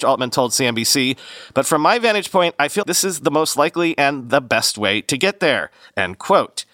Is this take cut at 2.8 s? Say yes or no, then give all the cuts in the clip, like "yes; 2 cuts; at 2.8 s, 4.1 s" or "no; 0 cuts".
yes; 1 cut; at 2.8 s